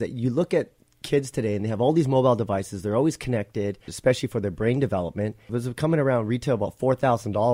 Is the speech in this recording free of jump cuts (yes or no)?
no